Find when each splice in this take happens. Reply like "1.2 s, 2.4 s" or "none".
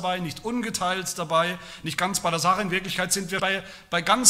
3.4 s